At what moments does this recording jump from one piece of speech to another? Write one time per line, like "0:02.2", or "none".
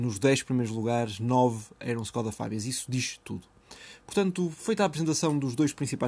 none